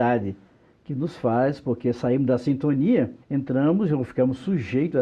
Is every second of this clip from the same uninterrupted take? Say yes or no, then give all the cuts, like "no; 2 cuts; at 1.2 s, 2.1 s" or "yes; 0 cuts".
no; 1 cut; at 3.2 s